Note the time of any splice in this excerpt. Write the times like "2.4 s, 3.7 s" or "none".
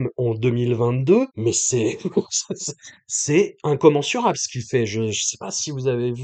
1.3 s